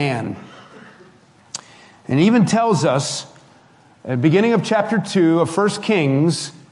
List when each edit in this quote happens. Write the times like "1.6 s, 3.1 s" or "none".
none